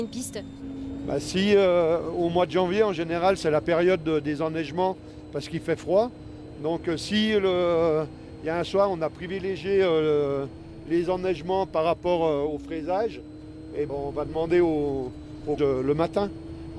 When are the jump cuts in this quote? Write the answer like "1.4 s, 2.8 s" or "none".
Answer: 13.9 s, 15.6 s